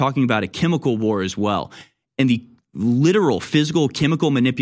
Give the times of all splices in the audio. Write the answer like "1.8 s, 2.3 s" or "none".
none